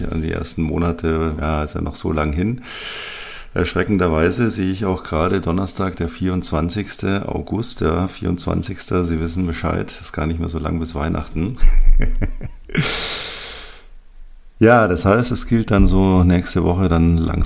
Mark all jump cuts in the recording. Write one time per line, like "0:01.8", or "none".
0:01.4